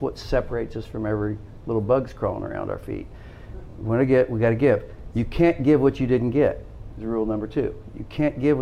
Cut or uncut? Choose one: uncut